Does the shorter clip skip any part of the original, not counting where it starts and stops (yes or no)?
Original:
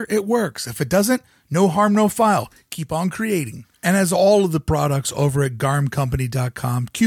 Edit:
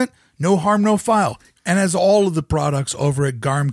yes